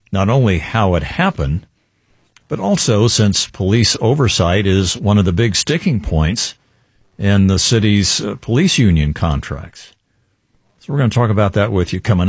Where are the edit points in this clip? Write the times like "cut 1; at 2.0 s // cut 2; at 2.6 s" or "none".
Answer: none